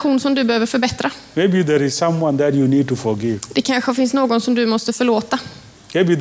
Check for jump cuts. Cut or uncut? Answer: uncut